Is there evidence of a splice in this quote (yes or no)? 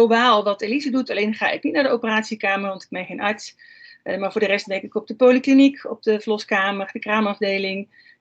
no